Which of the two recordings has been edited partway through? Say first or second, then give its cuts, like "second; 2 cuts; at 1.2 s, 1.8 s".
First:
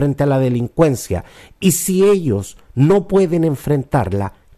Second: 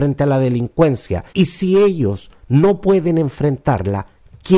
second; 1 cut; at 1.3 s